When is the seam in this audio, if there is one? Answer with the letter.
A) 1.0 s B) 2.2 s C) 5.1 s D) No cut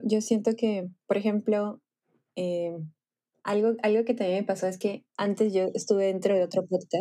C